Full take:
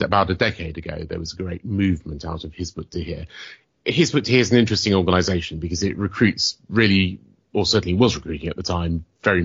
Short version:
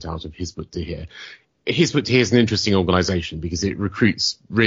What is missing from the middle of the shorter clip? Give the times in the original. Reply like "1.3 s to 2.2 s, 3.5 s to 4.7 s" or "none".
none